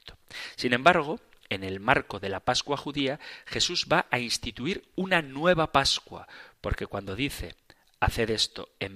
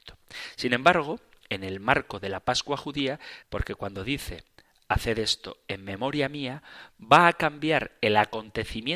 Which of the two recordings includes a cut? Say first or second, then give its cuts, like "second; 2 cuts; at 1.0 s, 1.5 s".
second; 1 cut; at 3.4 s